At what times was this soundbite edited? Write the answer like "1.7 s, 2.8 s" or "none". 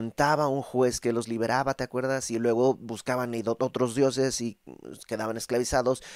none